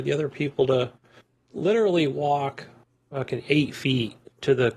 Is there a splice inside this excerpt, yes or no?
no